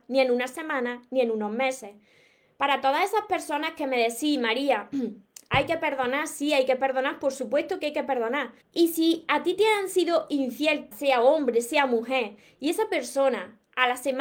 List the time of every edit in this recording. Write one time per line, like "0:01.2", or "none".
0:08.6
0:10.9